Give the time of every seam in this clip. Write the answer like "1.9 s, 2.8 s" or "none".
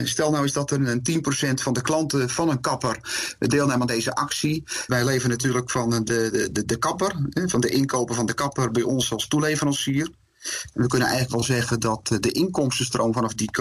4.9 s, 8.7 s